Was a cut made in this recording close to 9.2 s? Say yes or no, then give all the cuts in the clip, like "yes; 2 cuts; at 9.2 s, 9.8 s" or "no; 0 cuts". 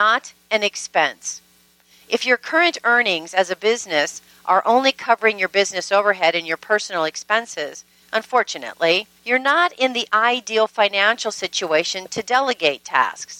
yes; 2 cuts; at 8.0 s, 9.2 s